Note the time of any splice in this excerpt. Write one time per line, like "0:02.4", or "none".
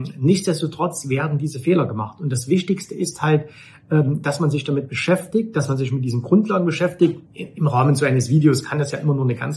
0:07.3